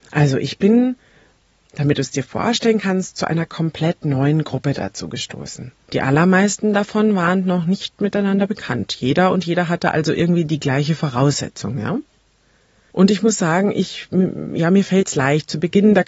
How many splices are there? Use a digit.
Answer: 0